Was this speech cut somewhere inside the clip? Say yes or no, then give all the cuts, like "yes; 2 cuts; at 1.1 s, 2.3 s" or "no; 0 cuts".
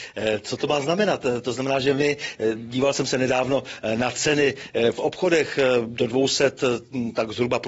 yes; 1 cut; at 1.4 s